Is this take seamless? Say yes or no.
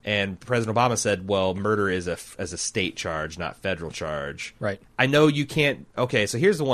no